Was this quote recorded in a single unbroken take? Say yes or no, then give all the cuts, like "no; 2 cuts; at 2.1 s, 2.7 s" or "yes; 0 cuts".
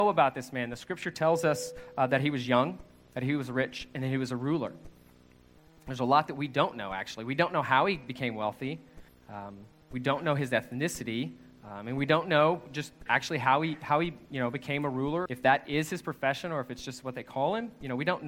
no; 2 cuts; at 9.1 s, 15.3 s